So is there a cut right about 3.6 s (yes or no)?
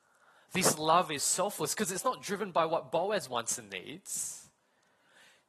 no